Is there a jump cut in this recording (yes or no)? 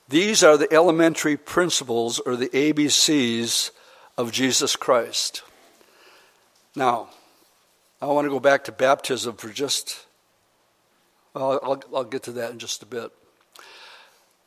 yes